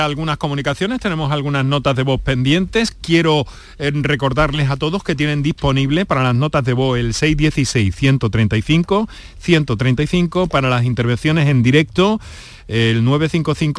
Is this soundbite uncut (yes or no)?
yes